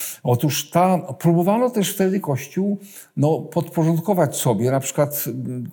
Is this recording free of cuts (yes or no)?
yes